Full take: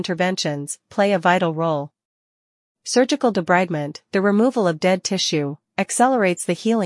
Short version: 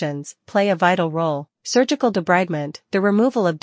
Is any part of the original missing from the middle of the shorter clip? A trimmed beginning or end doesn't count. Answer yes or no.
yes